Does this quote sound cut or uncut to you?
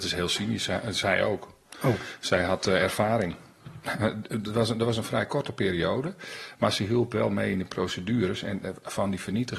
uncut